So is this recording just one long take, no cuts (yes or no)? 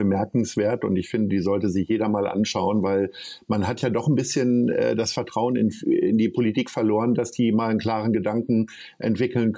yes